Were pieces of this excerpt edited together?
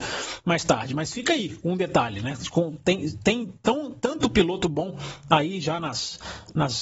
no; 0 cuts

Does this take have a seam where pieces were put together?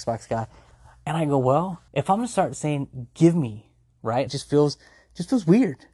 yes; 2 cuts; at 1.9 s, 4.3 s

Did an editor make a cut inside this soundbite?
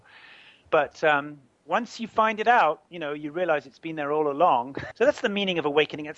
yes; 1 cut; at 4.9 s

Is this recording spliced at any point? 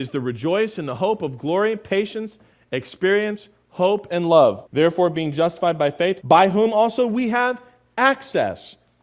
yes; 2 cuts; at 4.7 s, 6.2 s

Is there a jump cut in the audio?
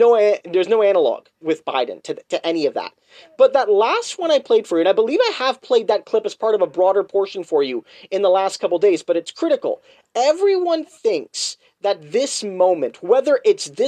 yes; 1 cut; at 1.4 s

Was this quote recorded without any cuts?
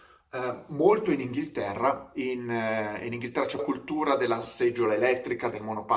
no; 1 cut; at 3.6 s

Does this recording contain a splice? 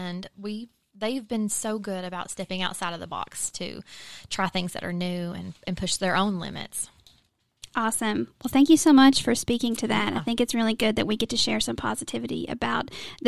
no; 0 cuts

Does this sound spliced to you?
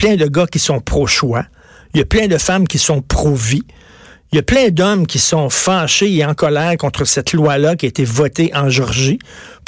no; 0 cuts

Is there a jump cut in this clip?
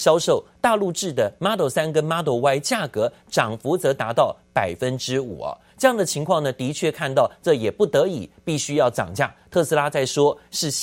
no; 0 cuts

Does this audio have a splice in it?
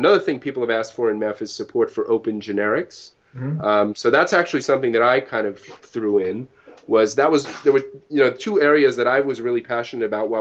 no; 0 cuts

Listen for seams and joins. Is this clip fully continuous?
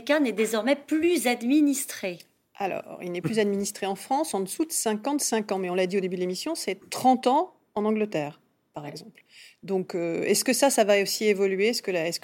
yes; 0 cuts

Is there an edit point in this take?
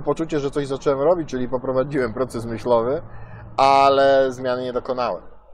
no; 0 cuts

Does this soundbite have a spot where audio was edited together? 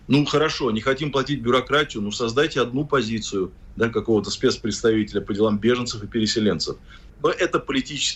yes; 1 cut; at 7.1 s

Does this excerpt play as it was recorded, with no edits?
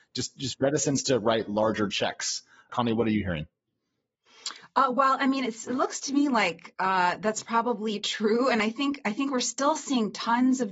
no; 1 cut; at 2.7 s

